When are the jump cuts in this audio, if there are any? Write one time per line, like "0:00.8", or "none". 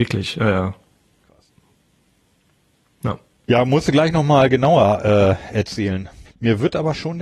0:06.3